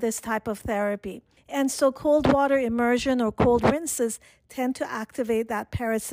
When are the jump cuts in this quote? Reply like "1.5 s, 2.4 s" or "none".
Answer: 1.4 s